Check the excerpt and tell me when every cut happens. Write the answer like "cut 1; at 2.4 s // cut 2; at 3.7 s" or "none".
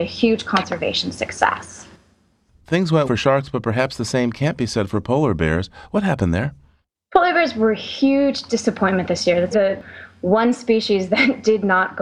cut 1; at 3.0 s // cut 2; at 9.5 s